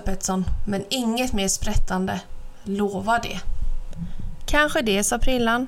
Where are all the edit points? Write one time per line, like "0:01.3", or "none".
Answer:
none

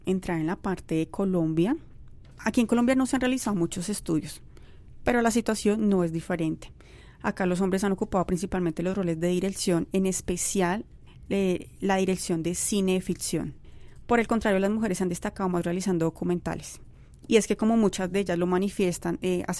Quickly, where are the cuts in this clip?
none

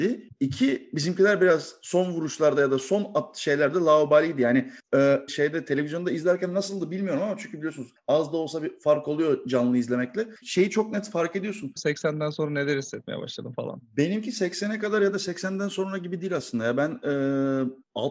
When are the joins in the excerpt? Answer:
0:05.3
0:10.4
0:11.8

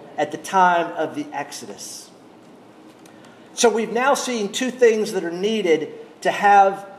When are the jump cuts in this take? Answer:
none

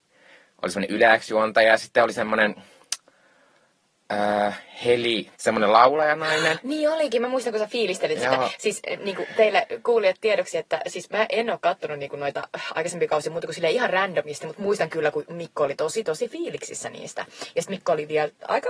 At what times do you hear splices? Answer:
0:05.3

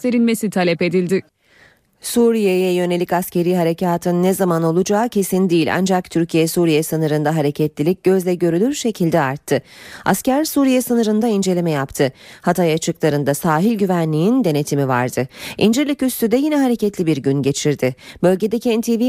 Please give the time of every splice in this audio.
none

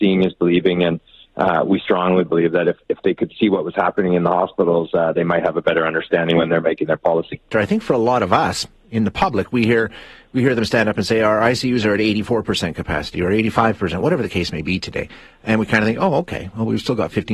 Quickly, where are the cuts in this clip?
0:07.5

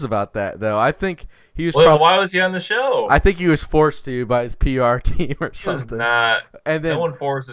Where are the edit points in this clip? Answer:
0:02.0

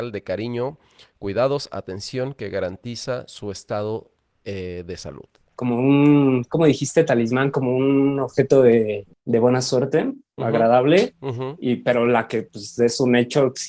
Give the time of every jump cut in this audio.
0:10.4

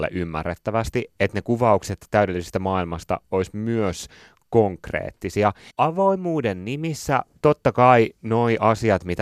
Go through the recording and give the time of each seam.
0:05.7

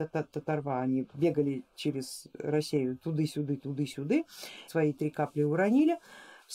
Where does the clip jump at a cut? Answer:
0:04.7

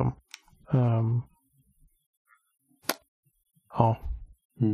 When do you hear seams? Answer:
none

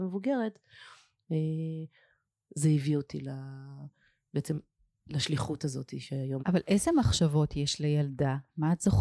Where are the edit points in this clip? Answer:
0:06.4

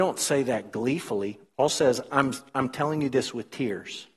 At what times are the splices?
none

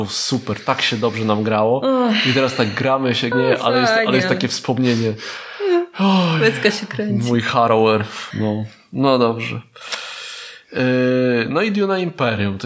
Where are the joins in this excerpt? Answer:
0:03.3
0:08.3

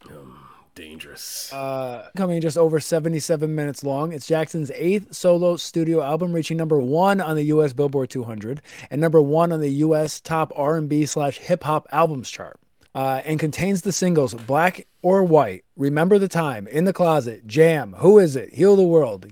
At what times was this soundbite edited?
0:02.1

